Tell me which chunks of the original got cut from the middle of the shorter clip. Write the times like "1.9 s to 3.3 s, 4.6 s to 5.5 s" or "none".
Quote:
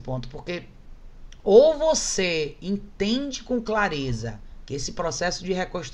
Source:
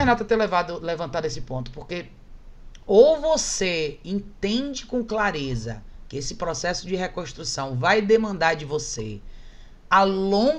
none